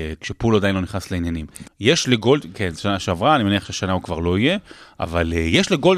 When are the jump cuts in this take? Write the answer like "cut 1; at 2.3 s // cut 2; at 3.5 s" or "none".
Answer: cut 1; at 1.6 s